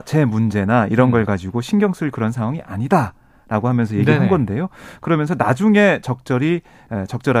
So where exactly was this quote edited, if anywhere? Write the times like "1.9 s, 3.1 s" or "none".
none

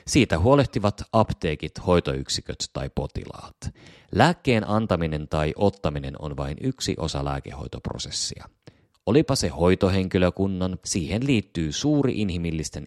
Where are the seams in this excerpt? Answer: 10.8 s

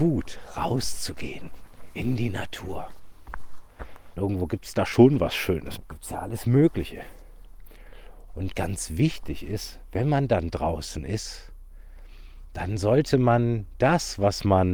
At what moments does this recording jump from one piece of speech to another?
4.2 s, 5.8 s, 8.3 s

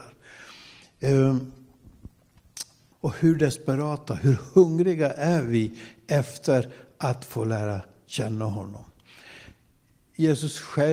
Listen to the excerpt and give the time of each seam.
2.9 s

